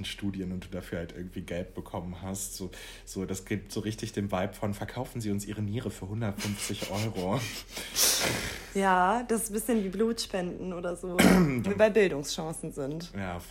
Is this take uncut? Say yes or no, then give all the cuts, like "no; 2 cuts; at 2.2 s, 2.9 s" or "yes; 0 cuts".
no; 1 cut; at 11.6 s